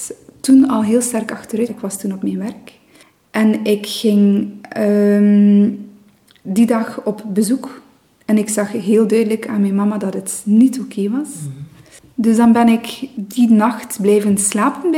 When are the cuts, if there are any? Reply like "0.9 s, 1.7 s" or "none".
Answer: 1.7 s